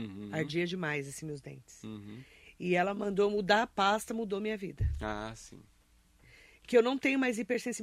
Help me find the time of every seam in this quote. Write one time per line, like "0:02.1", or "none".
0:06.2